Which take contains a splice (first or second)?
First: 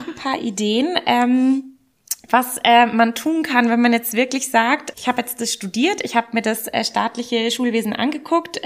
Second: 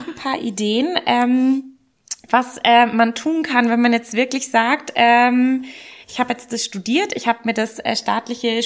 first